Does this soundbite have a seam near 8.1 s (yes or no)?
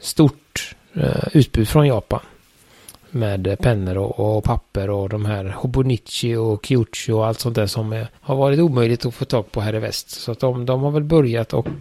yes